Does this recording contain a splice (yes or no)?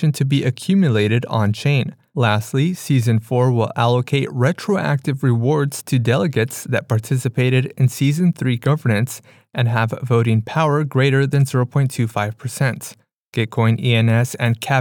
no